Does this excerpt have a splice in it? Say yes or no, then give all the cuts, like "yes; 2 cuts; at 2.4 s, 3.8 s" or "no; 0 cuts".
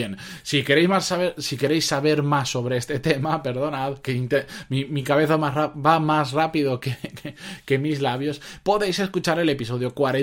no; 0 cuts